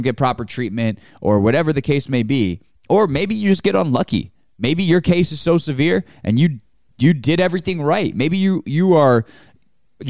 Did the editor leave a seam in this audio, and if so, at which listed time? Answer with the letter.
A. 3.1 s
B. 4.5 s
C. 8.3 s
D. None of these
D